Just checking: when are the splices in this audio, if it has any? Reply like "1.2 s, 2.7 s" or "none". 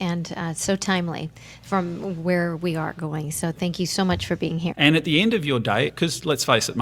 4.7 s, 5.9 s

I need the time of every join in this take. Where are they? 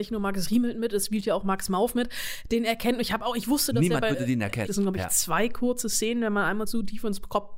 4.7 s

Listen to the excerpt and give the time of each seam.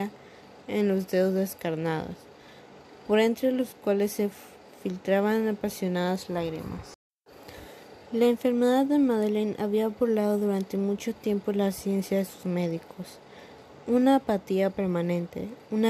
none

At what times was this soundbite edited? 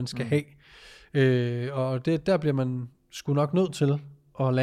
none

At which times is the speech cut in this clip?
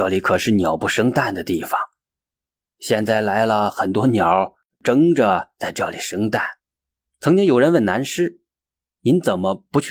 6.6 s

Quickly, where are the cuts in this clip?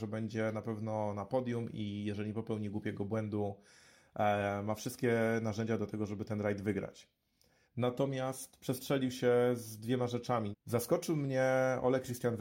7.6 s, 10.5 s

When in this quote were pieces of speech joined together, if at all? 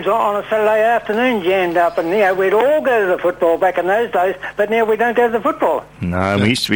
none

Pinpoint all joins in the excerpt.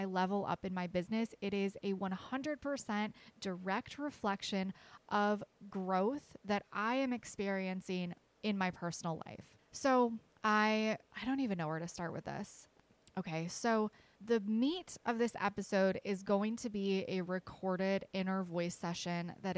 11.1 s

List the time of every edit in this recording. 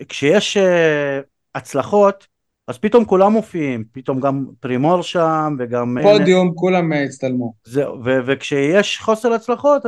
6.0 s

